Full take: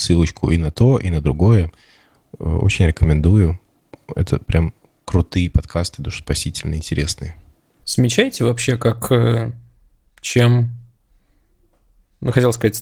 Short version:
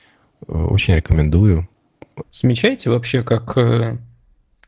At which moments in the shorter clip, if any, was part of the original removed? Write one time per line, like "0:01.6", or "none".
0:02.2